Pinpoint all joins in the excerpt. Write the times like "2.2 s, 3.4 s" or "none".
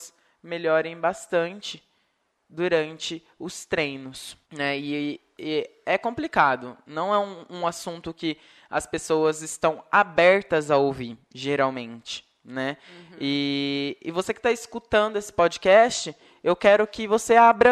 4.4 s